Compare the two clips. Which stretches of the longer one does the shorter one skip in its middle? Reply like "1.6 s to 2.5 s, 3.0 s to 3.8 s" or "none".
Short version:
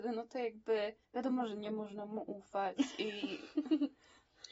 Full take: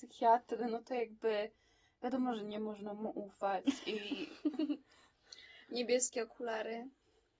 1.6 s to 1.9 s

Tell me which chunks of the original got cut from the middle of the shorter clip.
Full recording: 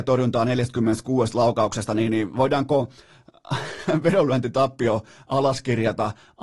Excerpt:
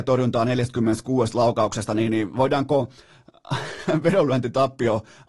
none

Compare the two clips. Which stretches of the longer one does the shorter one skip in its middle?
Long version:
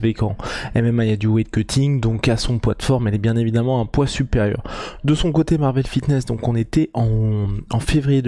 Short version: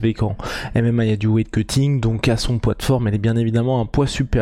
none

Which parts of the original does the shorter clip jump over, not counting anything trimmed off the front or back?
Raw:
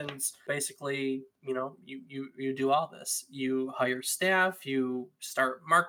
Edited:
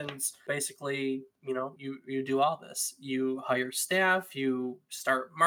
1.8 s to 2.1 s

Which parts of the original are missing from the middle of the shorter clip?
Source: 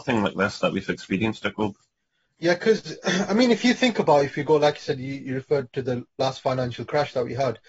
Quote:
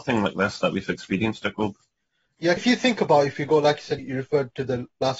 2.6 s to 3.5 s, 5.0 s to 5.2 s

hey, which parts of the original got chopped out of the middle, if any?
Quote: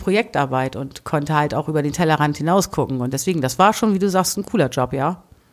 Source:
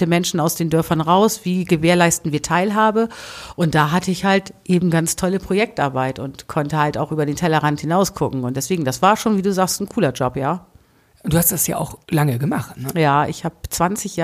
none

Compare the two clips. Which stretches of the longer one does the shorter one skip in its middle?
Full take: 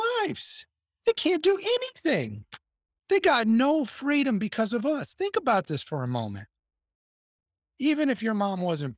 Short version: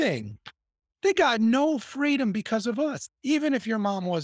5.1 s to 7.6 s

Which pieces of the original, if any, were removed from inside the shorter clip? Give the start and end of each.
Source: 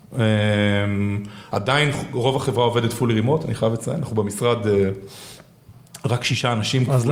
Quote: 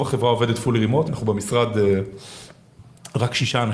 3.4 s to 4.0 s

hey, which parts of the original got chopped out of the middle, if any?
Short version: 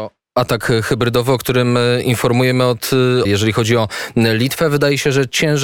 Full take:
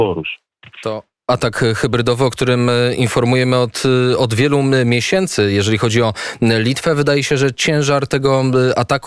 4.2 s to 5.5 s

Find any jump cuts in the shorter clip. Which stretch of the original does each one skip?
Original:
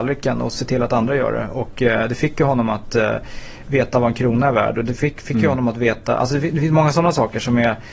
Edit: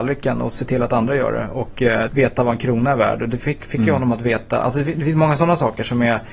2.1 s to 3.6 s

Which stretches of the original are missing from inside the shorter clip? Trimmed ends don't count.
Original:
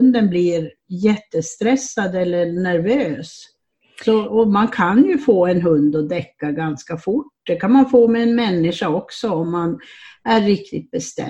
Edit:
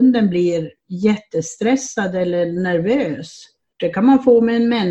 3.7 s to 7.4 s

